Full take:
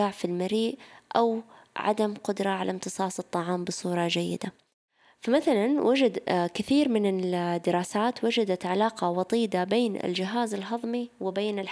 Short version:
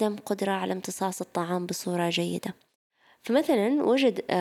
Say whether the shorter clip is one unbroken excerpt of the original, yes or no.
yes